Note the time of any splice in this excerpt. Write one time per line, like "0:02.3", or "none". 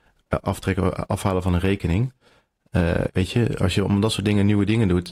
0:03.1